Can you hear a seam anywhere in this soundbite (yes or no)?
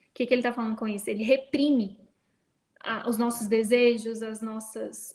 no